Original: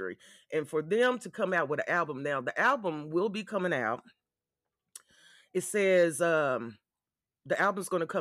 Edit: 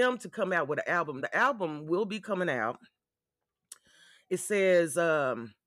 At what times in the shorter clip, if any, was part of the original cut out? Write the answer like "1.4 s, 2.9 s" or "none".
1.2 s